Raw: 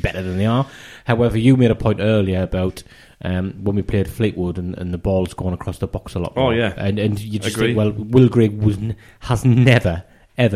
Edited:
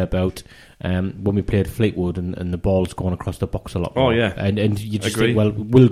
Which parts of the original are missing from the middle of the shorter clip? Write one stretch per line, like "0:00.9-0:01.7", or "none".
none